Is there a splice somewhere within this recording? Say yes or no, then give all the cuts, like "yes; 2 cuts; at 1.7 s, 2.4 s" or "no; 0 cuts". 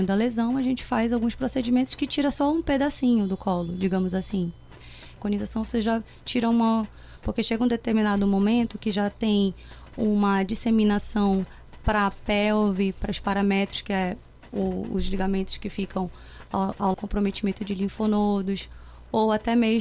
yes; 3 cuts; at 5.2 s, 7.2 s, 16.9 s